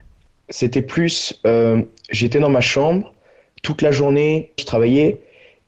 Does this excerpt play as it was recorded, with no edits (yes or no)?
no